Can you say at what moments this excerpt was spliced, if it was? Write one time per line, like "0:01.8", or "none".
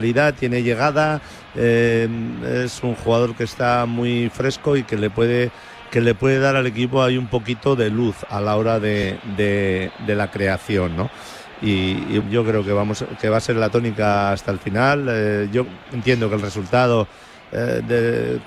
0:12.2